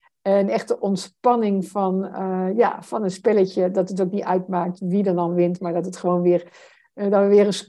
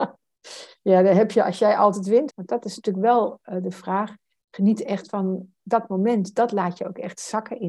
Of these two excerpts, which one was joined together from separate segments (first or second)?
second